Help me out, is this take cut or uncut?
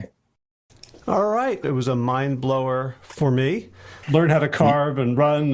cut